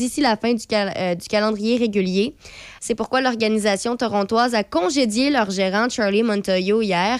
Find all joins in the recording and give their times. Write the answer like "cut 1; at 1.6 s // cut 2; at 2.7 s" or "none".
cut 1; at 2.8 s